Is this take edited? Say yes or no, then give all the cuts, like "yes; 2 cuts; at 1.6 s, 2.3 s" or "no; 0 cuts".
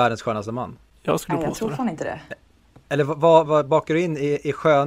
yes; 1 cut; at 3.5 s